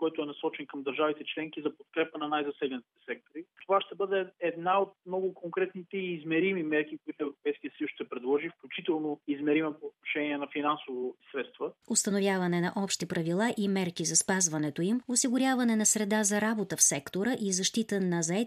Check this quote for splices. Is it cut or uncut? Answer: cut